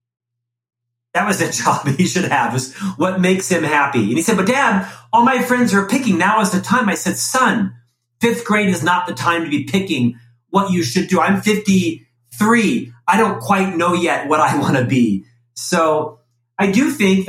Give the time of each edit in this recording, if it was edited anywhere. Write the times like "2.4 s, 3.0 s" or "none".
none